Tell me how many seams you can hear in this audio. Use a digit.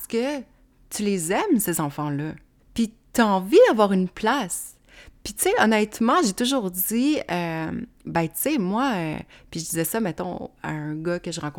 1